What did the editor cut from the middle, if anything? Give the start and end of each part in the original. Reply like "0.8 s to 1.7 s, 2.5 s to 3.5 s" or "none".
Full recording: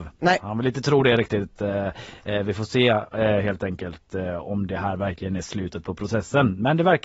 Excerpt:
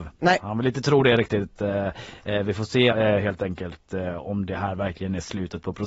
2.9 s to 3.1 s